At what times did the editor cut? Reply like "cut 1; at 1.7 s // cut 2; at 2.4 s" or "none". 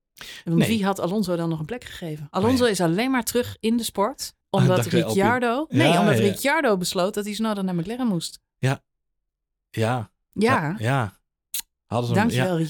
none